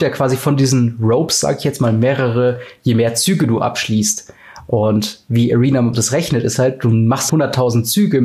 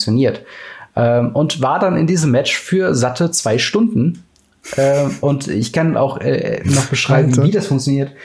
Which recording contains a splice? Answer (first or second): first